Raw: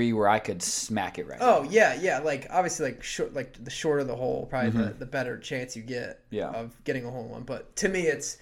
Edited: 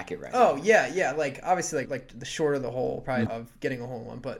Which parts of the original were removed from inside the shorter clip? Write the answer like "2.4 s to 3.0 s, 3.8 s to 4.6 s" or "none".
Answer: 2.9 s to 3.3 s, 4.7 s to 6.5 s